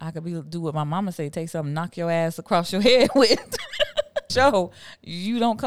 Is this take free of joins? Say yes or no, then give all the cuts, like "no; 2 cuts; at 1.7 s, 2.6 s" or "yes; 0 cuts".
no; 1 cut; at 4.3 s